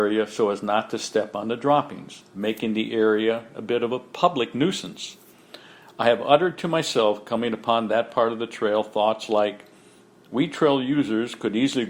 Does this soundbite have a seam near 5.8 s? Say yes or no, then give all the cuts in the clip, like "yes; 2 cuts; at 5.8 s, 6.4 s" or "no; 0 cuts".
no; 0 cuts